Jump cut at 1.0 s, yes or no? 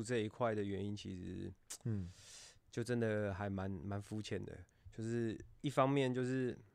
no